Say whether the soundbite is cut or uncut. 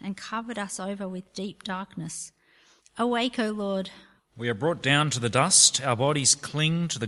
cut